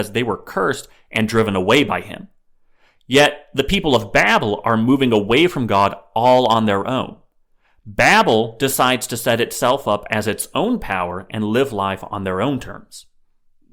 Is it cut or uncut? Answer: uncut